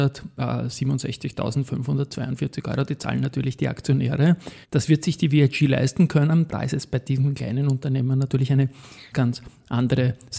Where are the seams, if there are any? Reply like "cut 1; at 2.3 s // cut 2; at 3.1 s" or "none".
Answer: cut 1; at 4.6 s // cut 2; at 6.5 s // cut 3; at 9.1 s